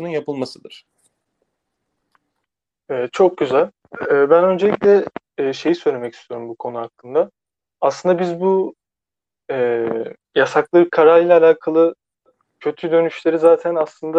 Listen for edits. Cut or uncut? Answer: uncut